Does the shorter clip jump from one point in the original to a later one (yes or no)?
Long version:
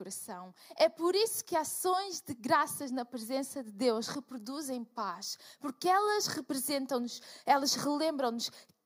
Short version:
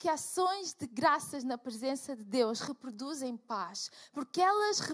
no